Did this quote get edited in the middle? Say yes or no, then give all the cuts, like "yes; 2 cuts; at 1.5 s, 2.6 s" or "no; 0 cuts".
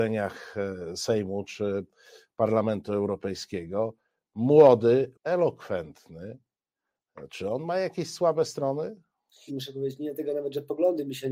yes; 2 cuts; at 5.1 s, 9.5 s